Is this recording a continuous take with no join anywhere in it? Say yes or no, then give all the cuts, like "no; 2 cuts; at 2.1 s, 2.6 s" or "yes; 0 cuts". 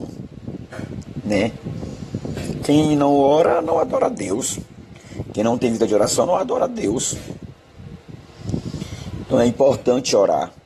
yes; 0 cuts